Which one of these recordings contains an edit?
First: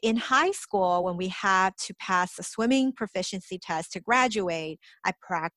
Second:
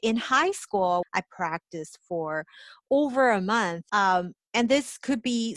second; 2 cuts; at 1.0 s, 3.9 s

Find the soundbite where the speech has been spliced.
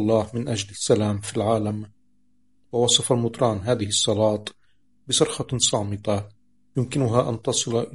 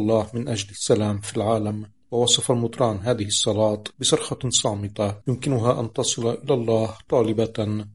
second; 3 cuts; at 2.0 s, 3.9 s, 5.2 s

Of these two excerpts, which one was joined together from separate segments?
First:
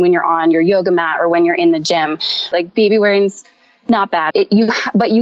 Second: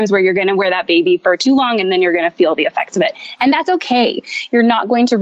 first; 2 cuts; at 2.5 s, 4.3 s

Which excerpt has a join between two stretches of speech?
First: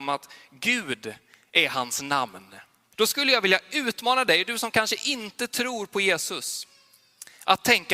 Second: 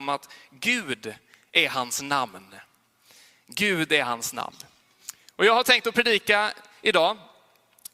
first; 1 cut; at 2.9 s

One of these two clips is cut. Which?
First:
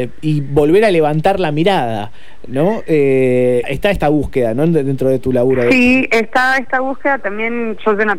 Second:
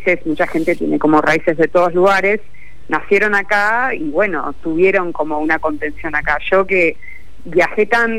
first; 1 cut; at 3.6 s

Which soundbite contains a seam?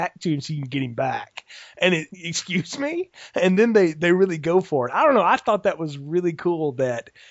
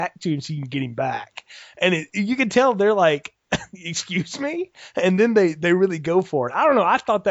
first; 1 cut; at 2.1 s

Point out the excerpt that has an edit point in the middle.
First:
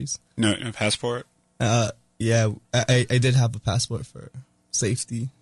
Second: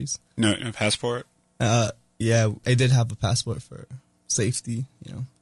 second; 1 cut; at 2.6 s

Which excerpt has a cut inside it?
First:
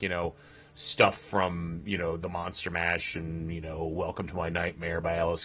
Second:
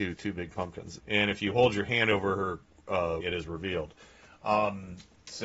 second; 2 cuts; at 1.0 s, 3.2 s

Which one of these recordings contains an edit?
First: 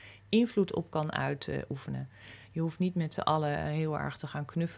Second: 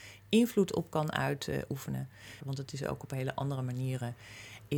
second; 1 cut; at 2.4 s

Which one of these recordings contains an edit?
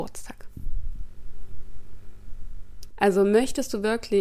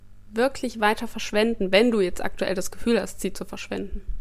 first; 1 cut; at 2.9 s

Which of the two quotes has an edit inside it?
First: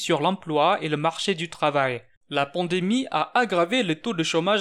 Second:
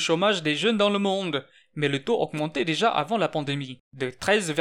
first; 1 cut; at 2.2 s

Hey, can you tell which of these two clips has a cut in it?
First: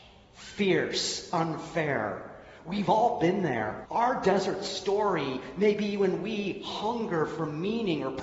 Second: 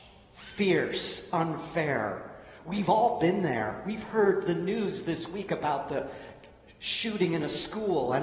first; 1 cut; at 3.8 s

